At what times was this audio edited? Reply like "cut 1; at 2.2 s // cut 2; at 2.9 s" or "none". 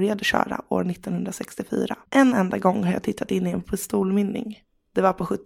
cut 1; at 2.1 s